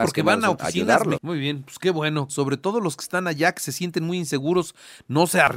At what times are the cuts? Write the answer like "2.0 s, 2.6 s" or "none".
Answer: 1.2 s, 2.3 s